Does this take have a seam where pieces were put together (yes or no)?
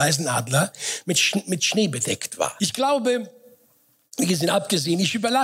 yes